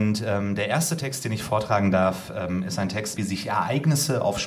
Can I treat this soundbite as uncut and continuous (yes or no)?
no